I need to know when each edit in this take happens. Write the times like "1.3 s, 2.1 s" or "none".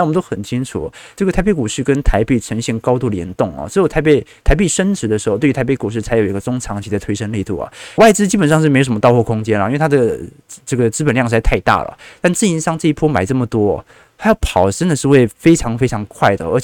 8.0 s

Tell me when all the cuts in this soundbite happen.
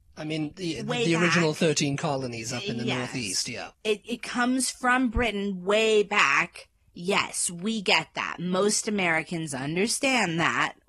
3.7 s

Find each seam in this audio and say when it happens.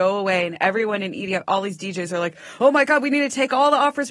none

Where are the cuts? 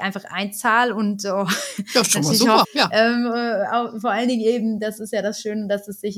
2.6 s

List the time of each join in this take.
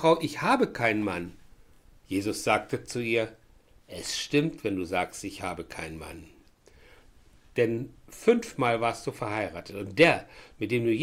none

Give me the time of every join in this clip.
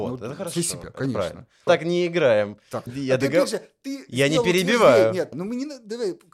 1.7 s, 2.9 s, 5.3 s

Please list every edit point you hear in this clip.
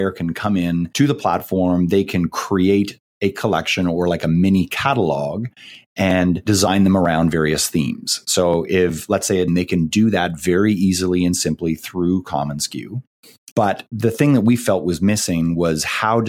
9.5 s, 13.5 s

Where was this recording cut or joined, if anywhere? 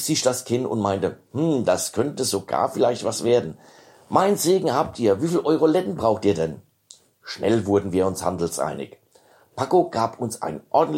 none

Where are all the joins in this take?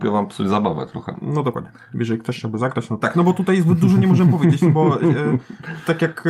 3.0 s

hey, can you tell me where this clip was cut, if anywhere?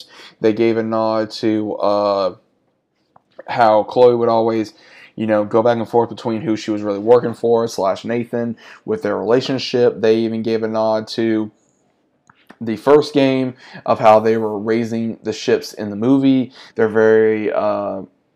16.7 s

